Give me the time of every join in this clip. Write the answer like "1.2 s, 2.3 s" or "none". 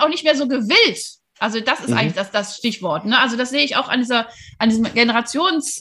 none